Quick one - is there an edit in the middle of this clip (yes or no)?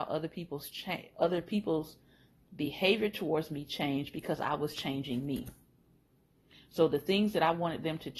no